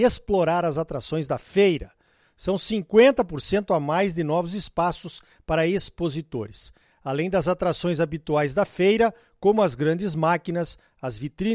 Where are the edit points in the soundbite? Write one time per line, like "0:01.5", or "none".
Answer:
none